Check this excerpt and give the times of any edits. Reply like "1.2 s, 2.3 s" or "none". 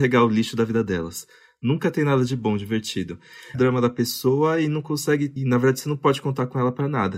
3.5 s, 5.4 s